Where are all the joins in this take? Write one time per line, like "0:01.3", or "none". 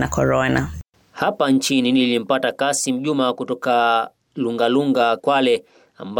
0:05.2